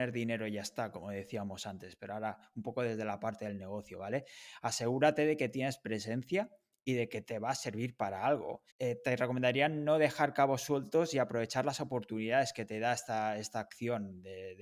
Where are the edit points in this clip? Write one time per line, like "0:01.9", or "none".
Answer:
0:08.7